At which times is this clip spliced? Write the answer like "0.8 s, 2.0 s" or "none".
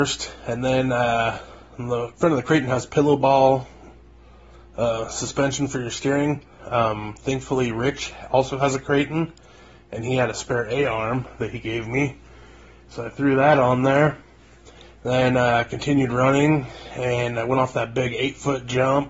6.6 s